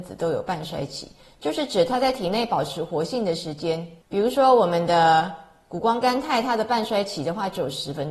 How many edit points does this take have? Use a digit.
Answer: 1